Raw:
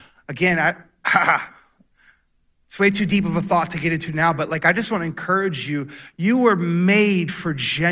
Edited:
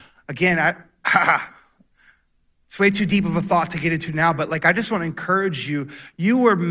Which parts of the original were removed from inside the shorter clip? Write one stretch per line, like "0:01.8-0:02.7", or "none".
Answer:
none